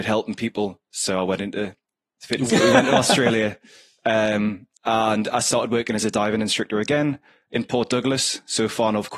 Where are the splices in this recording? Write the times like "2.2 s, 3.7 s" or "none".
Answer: 2.5 s, 4.7 s